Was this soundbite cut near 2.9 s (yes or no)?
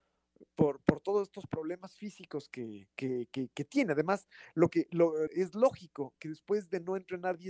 yes